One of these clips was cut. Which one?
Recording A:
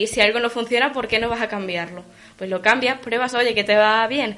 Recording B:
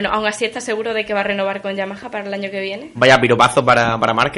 B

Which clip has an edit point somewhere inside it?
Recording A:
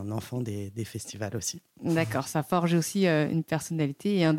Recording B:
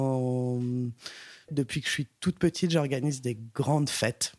B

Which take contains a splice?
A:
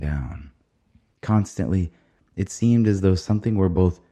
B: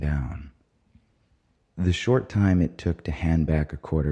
A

